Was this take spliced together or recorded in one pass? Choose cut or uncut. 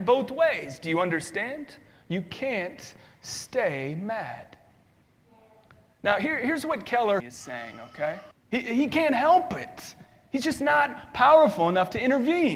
cut